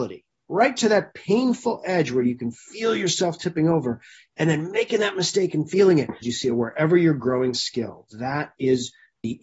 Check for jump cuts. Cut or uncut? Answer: cut